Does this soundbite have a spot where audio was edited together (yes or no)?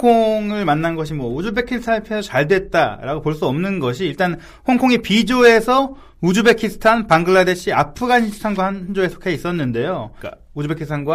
yes